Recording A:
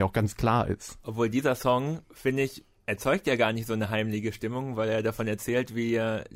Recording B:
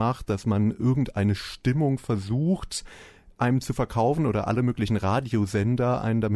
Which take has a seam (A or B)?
A